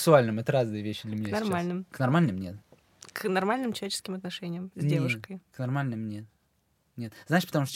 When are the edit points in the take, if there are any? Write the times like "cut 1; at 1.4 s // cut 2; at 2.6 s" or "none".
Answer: none